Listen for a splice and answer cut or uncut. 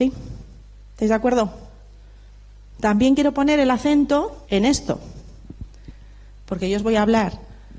cut